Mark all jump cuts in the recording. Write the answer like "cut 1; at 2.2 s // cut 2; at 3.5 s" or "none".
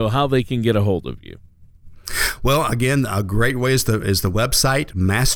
none